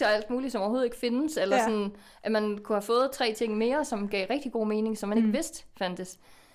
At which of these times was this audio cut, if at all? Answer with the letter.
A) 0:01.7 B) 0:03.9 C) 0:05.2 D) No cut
D